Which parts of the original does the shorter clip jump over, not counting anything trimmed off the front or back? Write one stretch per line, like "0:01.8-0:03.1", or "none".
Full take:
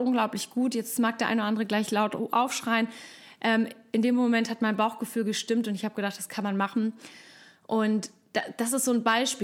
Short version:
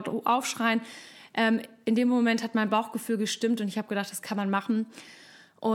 none